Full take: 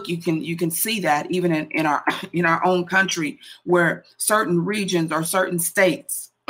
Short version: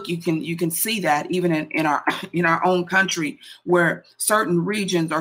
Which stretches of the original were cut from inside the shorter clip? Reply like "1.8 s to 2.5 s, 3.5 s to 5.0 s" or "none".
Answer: none